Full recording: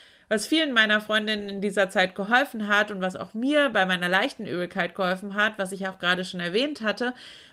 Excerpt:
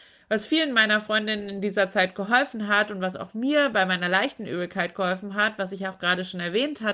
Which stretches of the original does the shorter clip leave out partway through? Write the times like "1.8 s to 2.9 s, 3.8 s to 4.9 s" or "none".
none